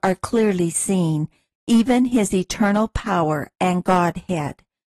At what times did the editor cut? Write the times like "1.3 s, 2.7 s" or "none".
1.5 s